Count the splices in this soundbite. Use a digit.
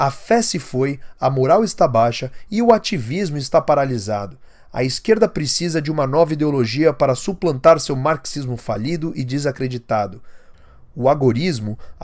0